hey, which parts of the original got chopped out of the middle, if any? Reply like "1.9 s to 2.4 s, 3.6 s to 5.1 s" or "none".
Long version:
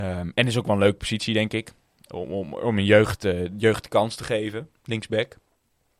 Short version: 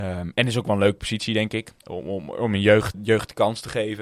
1.8 s to 2.0 s, 3.2 s to 3.5 s